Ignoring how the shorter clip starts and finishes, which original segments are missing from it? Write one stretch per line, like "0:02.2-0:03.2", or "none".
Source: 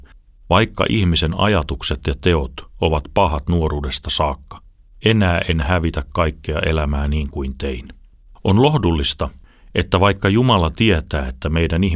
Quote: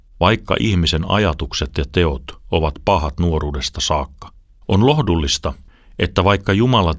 0:04.9-0:08.4